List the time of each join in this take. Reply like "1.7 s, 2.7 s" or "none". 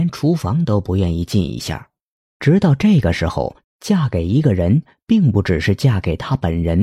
2.2 s, 3.6 s